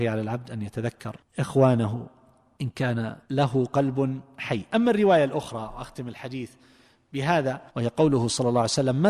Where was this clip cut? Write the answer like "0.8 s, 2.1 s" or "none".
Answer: 3.2 s, 7.7 s